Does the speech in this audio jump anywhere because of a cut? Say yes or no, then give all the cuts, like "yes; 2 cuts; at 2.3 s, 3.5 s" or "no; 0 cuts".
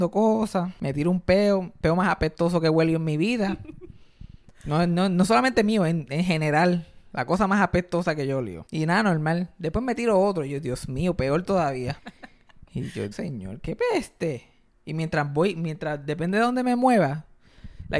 yes; 2 cuts; at 12.0 s, 13.1 s